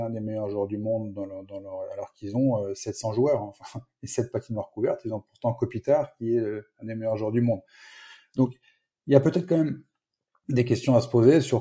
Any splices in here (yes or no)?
no